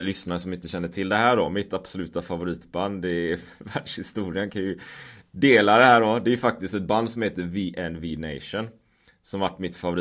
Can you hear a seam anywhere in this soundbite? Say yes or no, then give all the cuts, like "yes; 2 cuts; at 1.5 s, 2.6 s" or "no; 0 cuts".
no; 0 cuts